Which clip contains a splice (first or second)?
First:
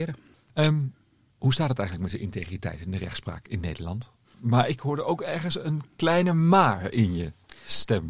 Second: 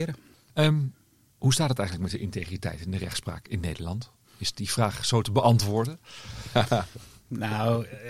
first